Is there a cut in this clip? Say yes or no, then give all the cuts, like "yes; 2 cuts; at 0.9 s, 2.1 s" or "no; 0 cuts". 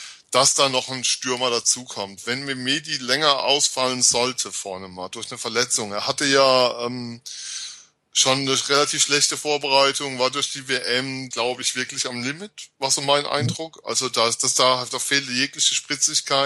yes; 1 cut; at 11.3 s